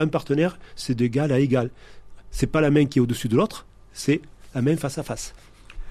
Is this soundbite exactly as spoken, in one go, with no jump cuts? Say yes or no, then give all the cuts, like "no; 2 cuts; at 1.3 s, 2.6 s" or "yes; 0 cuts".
yes; 0 cuts